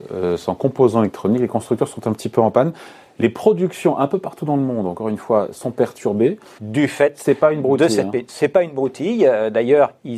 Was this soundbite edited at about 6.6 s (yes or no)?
yes